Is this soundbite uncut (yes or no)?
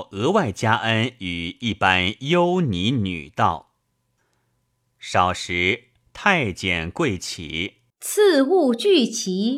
no